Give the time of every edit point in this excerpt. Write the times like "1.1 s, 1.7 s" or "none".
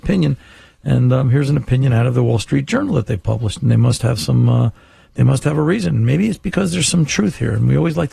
none